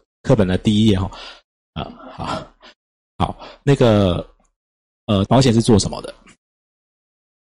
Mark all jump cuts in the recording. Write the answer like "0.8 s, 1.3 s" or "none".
1.5 s, 5.3 s